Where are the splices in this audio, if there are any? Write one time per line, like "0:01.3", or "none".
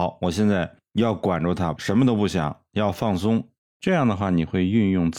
0:01.8
0:03.6